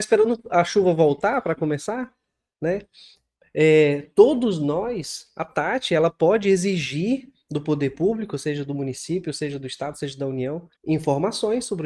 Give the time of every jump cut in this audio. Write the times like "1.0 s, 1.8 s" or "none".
10.8 s